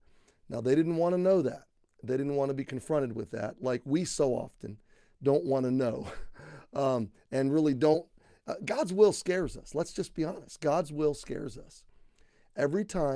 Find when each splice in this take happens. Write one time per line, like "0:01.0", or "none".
none